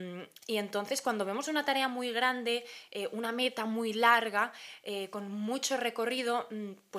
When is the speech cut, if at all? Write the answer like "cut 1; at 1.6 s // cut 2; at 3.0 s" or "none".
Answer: none